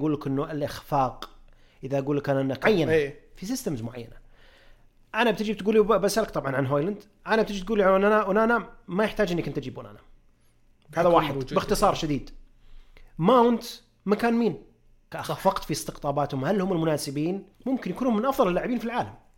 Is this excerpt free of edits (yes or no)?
no